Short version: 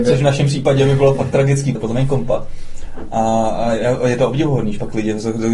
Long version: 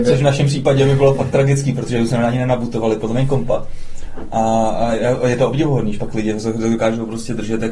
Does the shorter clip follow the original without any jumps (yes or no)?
no